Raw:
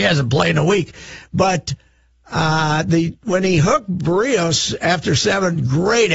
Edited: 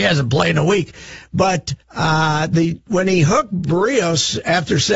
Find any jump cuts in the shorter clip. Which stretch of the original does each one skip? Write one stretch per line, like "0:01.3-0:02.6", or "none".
0:01.8-0:02.2